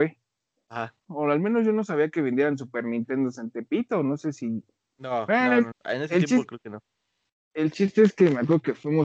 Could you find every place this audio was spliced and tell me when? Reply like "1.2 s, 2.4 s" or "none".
1.1 s, 5.7 s